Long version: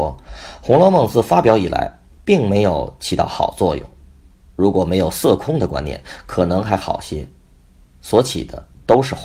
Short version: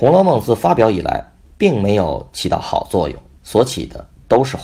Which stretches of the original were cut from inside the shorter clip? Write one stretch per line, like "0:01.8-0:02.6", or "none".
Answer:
0:04.0-0:07.9